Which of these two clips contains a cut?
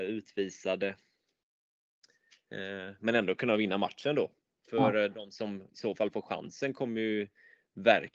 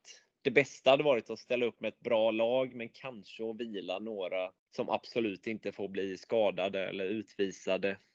second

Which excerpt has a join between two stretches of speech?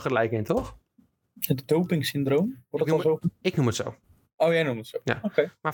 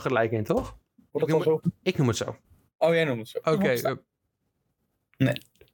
second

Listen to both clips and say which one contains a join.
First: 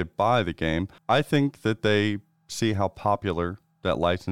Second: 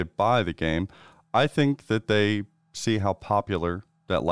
first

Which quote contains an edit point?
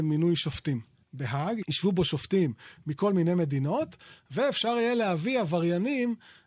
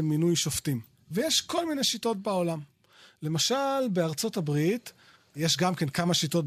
first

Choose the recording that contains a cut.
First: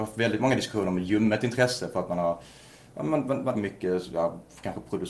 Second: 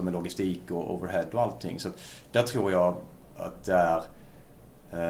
first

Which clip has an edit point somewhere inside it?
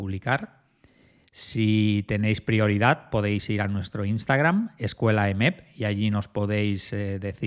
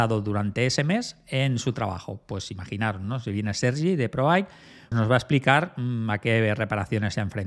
second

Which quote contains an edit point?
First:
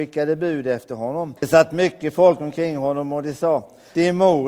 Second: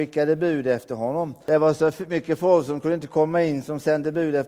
first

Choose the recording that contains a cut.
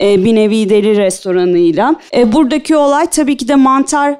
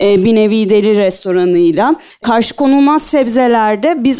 first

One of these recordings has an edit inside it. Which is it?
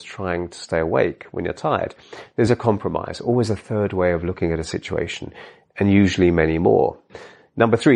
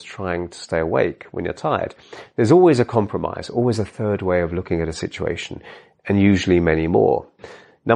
first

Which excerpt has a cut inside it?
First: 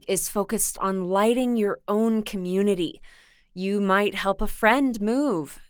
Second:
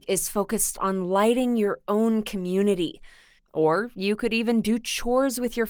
second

